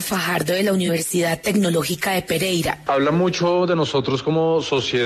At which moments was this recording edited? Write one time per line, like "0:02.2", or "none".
0:02.9